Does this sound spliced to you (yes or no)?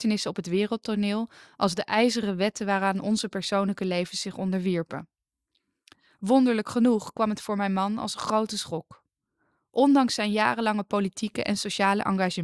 no